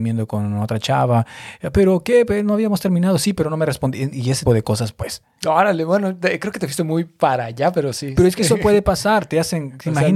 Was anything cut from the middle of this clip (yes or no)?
yes